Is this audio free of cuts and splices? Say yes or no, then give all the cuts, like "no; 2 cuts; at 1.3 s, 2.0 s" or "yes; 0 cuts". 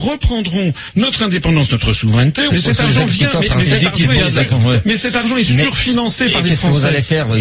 no; 1 cut; at 2.5 s